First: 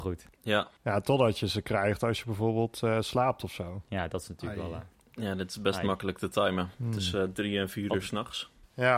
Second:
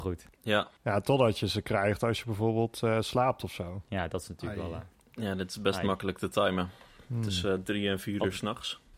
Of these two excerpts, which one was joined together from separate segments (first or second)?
first